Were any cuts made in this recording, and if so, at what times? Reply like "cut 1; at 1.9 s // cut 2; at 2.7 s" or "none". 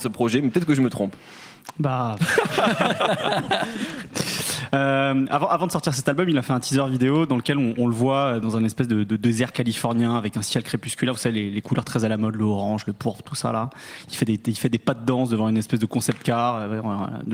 none